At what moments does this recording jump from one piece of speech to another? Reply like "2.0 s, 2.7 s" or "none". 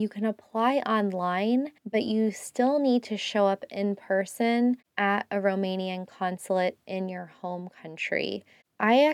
1.8 s